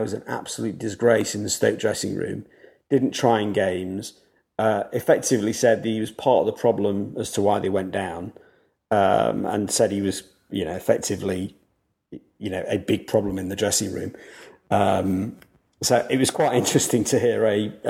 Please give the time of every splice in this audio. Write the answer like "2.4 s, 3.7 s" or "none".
none